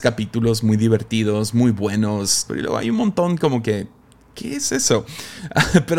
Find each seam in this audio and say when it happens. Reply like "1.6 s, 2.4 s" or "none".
2.5 s